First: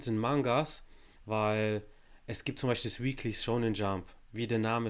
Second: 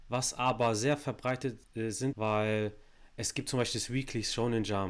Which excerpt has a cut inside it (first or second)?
second